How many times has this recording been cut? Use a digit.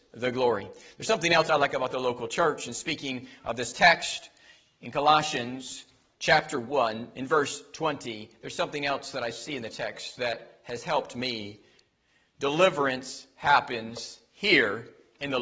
0